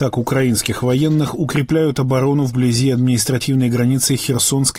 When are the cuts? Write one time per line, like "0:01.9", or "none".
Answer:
none